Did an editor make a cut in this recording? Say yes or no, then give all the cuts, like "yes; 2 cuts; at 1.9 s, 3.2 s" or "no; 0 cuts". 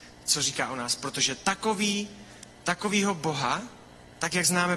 no; 0 cuts